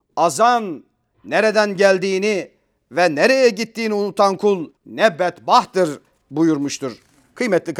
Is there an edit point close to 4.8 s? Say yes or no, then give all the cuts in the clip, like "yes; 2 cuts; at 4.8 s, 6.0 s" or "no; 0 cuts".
yes; 2 cuts; at 1.1 s, 4.8 s